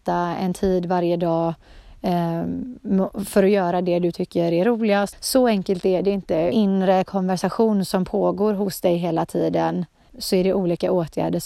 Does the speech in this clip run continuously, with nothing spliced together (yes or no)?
no